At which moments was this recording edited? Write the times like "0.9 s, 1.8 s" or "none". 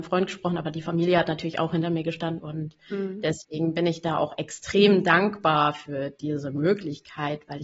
2.4 s